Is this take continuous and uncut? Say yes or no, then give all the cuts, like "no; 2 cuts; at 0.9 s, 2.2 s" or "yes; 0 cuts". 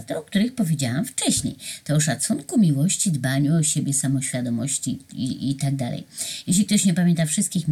yes; 0 cuts